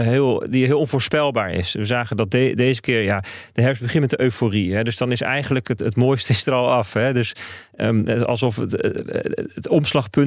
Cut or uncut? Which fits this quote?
cut